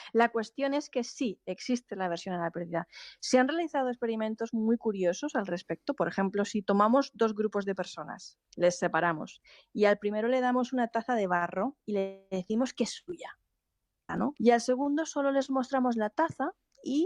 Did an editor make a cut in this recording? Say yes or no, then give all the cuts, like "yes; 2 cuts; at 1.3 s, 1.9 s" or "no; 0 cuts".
yes; 1 cut; at 14.3 s